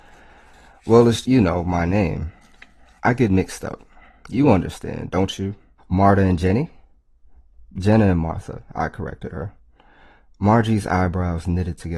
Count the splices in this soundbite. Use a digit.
2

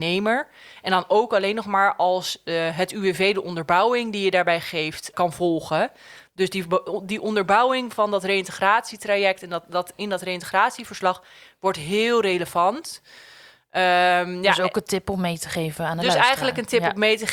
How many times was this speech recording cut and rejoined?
1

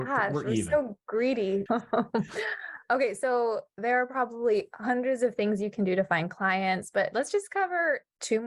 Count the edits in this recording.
1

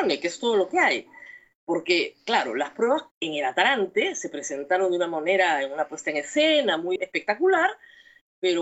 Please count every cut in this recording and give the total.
1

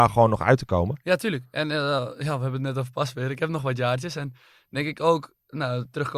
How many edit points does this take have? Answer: 0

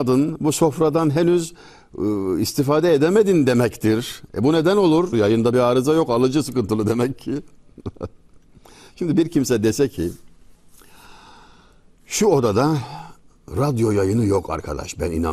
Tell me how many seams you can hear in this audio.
1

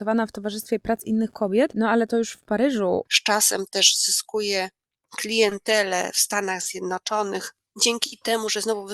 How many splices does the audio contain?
1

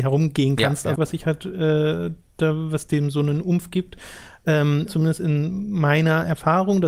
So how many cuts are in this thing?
2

